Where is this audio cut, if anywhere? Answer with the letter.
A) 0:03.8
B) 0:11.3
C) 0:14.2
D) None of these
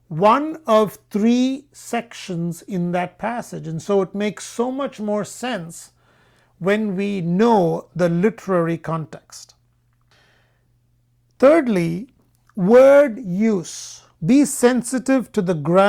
C